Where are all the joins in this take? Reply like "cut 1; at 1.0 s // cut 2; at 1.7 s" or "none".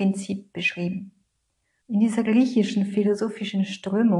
cut 1; at 1.8 s